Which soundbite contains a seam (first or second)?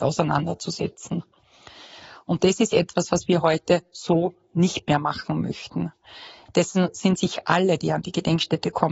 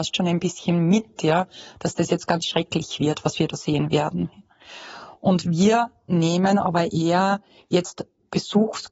first